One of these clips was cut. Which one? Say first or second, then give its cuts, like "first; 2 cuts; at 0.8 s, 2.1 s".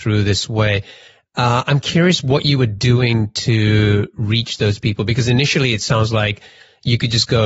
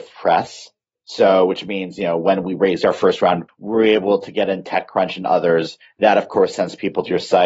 second; 1 cut; at 3.5 s